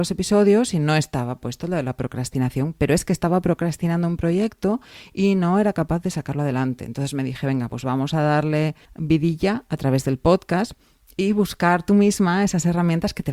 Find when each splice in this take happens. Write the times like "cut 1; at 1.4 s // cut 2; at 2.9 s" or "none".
none